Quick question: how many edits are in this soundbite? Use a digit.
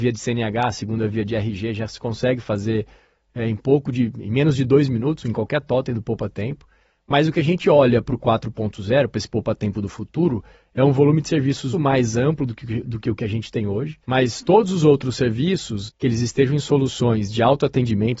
3